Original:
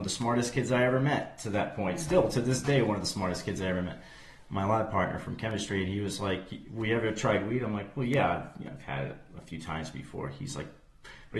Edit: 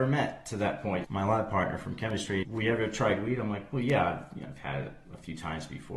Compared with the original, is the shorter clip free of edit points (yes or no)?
no